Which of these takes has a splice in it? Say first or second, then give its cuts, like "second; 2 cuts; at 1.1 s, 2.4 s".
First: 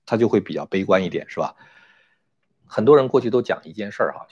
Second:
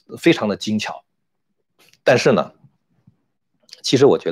first; 1 cut; at 2.6 s